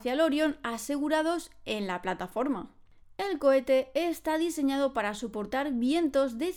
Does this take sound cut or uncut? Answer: uncut